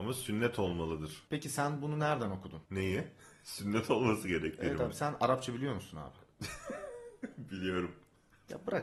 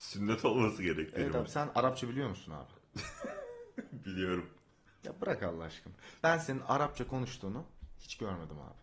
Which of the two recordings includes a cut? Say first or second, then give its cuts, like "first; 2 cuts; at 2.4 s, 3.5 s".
first; 1 cut; at 2.7 s